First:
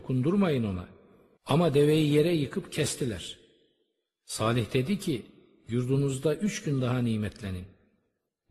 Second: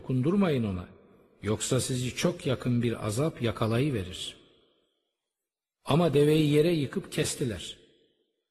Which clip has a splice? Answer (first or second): first